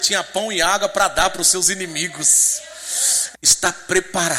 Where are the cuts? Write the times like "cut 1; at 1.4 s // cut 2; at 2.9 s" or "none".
cut 1; at 3.3 s

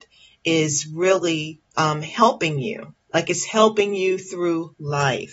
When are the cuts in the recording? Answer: cut 1; at 1.7 s // cut 2; at 3.0 s

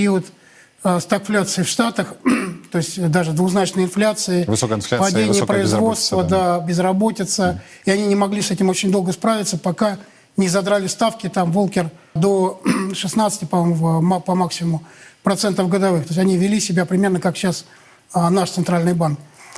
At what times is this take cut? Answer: cut 1; at 12.2 s

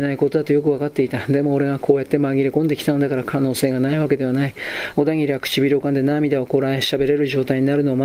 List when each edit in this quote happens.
cut 1; at 4.9 s

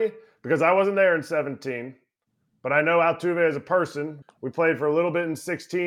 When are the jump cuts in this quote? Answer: cut 1; at 4.2 s

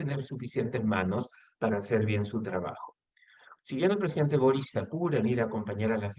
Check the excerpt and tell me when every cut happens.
cut 1; at 3.6 s

